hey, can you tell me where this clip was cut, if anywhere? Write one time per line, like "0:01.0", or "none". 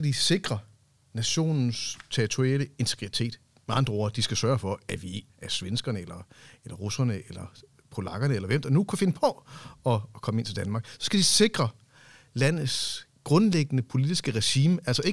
0:05.3